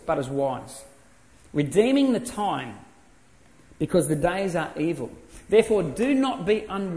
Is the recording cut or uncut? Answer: uncut